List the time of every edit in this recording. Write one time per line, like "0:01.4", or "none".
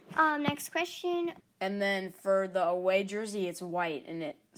0:01.4